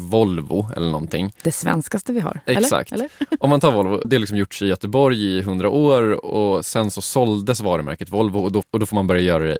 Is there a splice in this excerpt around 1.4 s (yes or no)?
no